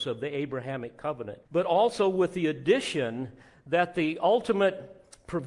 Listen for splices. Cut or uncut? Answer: cut